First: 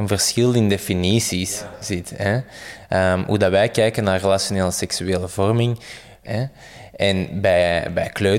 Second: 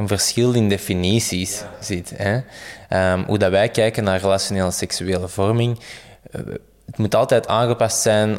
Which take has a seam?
first; 1 cut; at 6.2 s

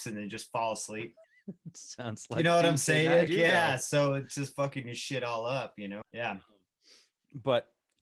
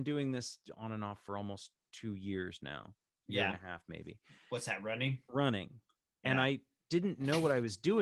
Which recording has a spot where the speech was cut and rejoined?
first; 3 cuts; at 1.2 s, 3.3 s, 6.0 s

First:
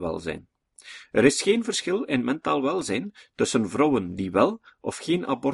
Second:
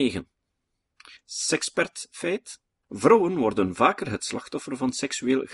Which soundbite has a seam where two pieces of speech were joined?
second; 2 cuts; at 1.2 s, 2.8 s

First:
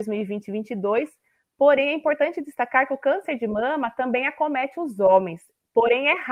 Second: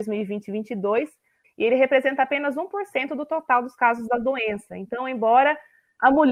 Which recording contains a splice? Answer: second; 1 cut; at 1.4 s

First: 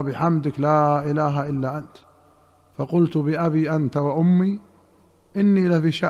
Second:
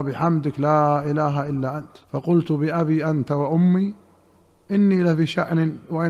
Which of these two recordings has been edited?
second; 1 cut; at 2.0 s

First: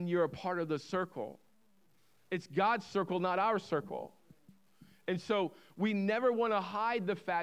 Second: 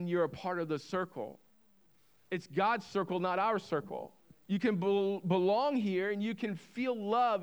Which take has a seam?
second; 1 cut; at 4.4 s

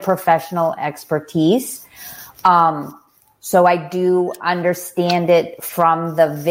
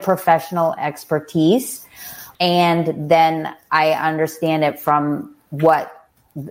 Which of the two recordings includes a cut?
second; 1 cut; at 2.3 s

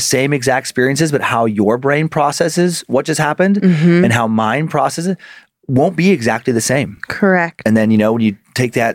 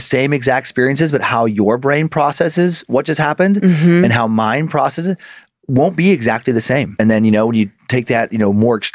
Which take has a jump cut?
second; 1 cut; at 7.0 s

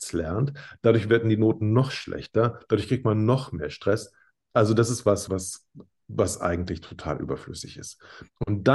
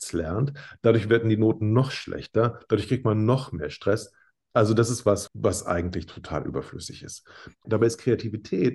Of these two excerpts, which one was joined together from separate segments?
second; 2 cuts; at 5.3 s, 7.6 s

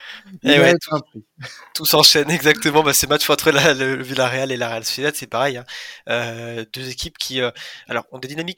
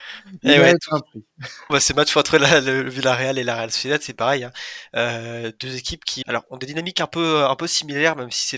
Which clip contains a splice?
second; 2 cuts; at 1.7 s, 6.2 s

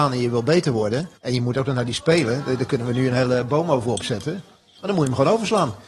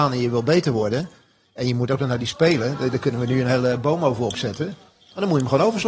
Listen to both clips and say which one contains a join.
first; 1 cut; at 1.2 s

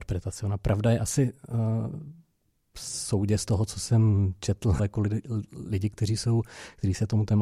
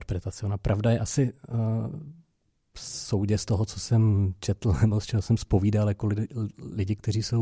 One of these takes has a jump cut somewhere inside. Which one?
first; 1 cut; at 4.8 s

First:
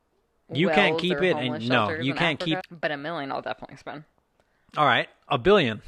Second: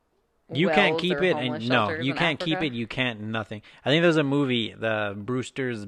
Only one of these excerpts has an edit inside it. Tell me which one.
first; 1 cut; at 2.6 s

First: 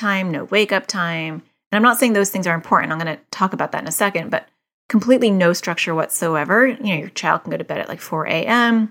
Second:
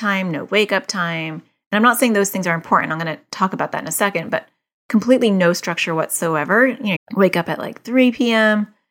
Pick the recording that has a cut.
second; 1 cut; at 7.0 s

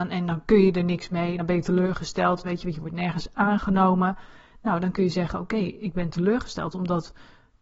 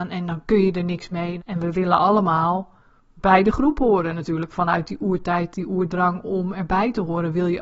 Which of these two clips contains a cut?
second; 1 cut; at 1.4 s

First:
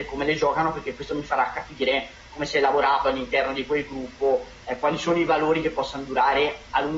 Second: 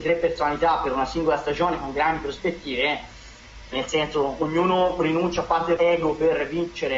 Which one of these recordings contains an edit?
second; 2 cuts; at 3.7 s, 5.8 s

